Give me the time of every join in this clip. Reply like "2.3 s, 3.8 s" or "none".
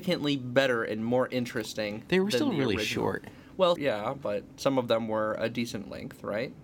3.8 s